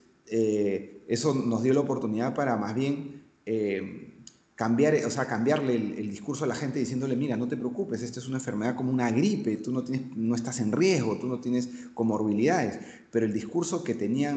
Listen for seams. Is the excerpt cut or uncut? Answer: uncut